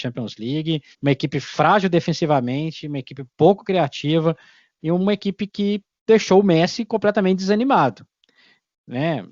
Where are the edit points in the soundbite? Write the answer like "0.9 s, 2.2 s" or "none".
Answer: 0.9 s

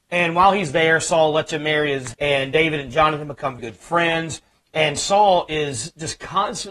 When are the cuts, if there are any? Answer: 2.1 s, 3.6 s

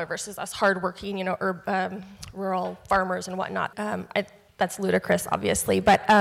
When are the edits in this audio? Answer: 3.7 s

